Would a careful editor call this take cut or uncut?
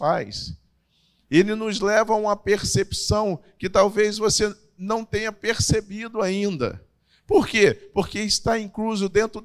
uncut